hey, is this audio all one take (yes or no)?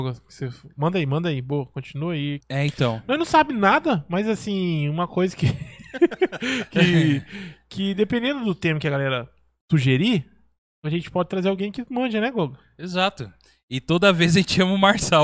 no